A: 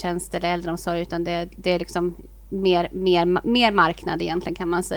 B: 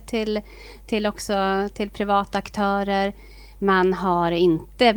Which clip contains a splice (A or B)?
A